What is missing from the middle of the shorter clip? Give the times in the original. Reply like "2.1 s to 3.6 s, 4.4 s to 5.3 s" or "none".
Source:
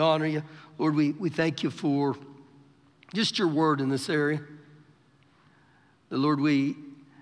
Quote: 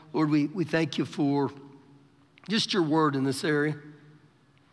none